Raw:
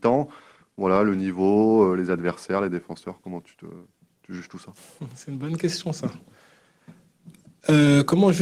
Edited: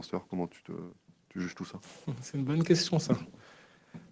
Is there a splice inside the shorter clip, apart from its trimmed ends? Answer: no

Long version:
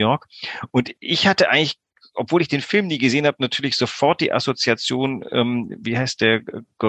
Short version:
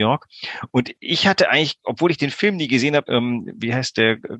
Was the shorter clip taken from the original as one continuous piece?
no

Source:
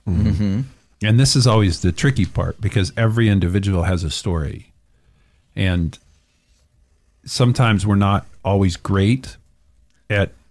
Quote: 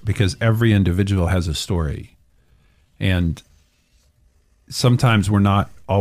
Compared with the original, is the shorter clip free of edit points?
yes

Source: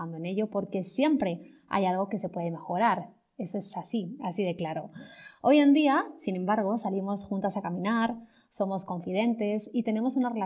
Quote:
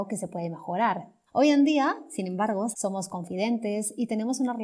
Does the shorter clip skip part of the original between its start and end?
yes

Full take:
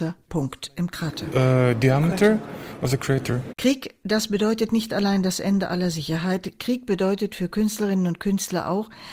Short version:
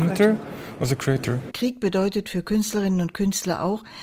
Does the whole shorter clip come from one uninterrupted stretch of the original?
no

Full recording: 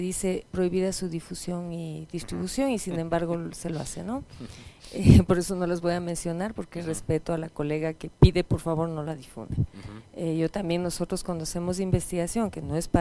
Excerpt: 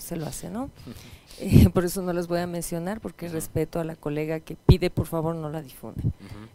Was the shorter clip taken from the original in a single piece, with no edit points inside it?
yes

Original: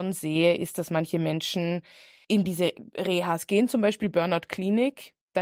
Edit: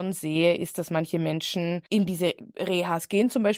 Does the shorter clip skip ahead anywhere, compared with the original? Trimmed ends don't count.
yes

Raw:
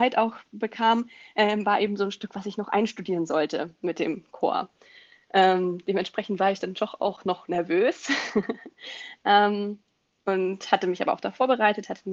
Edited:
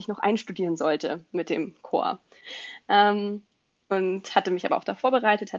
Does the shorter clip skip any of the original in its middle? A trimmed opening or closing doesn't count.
yes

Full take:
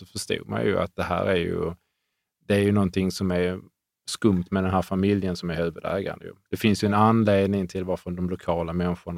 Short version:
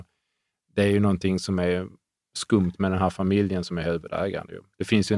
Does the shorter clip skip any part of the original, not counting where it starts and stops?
no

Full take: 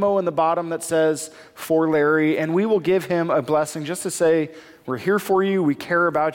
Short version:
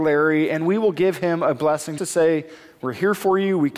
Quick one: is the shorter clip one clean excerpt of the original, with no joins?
no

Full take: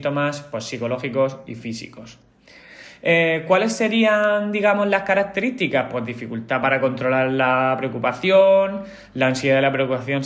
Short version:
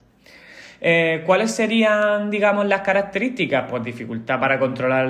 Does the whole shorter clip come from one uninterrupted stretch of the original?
yes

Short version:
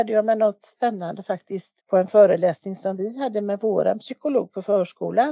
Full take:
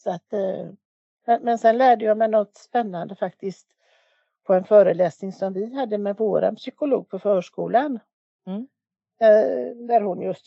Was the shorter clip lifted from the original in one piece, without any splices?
no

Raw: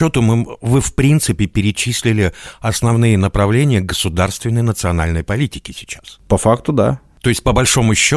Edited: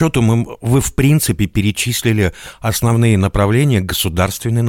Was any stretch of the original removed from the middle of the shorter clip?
no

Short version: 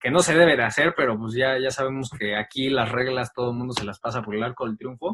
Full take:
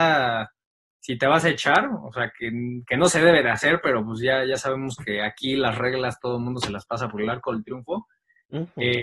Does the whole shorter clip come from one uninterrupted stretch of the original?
yes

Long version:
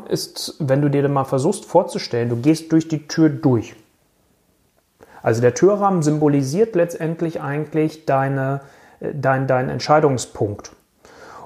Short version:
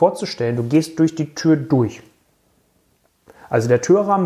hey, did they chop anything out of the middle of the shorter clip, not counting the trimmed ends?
no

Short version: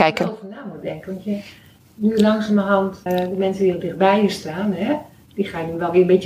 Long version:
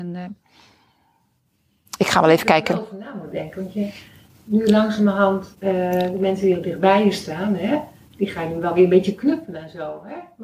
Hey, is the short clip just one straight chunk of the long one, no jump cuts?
no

